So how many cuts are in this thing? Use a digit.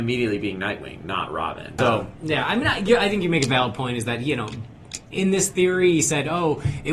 2